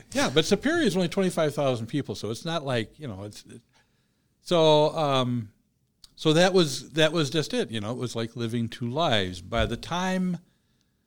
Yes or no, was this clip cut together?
no